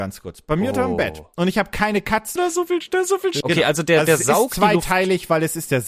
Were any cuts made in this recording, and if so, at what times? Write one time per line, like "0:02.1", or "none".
0:02.4
0:03.4